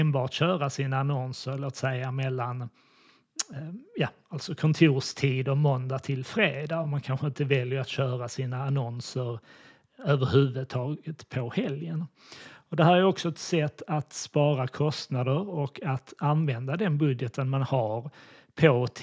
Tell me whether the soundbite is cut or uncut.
uncut